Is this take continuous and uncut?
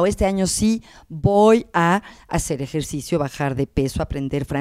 yes; 0 cuts

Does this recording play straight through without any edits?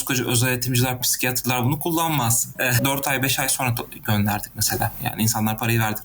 no; 2 cuts; at 1.0 s, 2.8 s

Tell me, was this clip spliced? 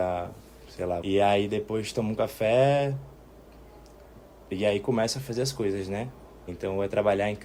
yes; 2 cuts; at 1.0 s, 6.5 s

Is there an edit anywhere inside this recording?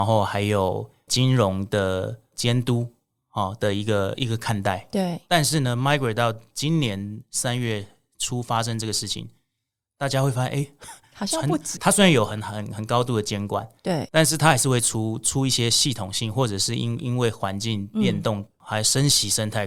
yes; 1 cut; at 11.8 s

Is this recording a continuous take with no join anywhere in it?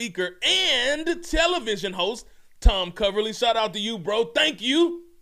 yes; 0 cuts

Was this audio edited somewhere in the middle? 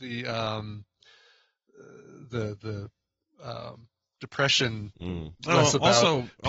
yes; 1 cut; at 5.4 s

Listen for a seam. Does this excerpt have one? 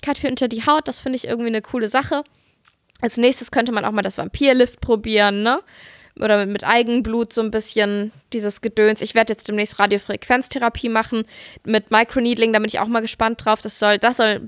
no; 0 cuts

